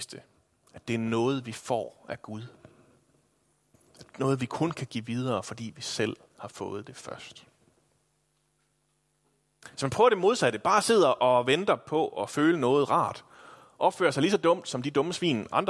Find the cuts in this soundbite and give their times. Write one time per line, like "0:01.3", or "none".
none